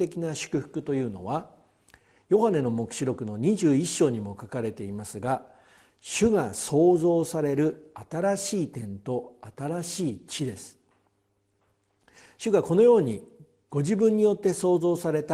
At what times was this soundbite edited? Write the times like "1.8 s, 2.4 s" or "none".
none